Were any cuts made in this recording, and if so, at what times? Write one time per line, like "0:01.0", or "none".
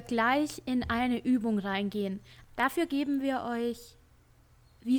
none